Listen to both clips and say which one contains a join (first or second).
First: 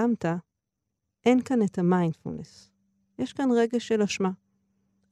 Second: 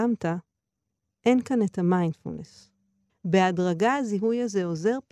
second